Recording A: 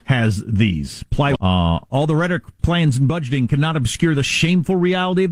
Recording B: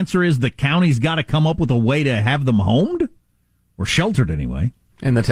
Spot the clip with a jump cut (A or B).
A